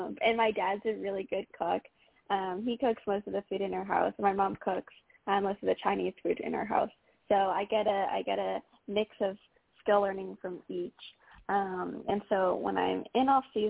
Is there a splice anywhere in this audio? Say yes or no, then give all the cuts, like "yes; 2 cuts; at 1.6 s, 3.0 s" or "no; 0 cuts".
no; 0 cuts